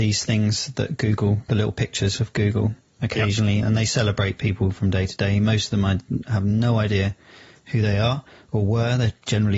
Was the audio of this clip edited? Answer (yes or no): no